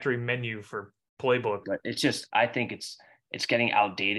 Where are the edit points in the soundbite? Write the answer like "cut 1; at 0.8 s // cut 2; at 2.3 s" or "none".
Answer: cut 1; at 1.6 s